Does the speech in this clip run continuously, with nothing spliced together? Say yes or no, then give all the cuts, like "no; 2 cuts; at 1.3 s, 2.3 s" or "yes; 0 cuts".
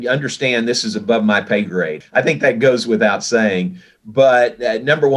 no; 1 cut; at 2.0 s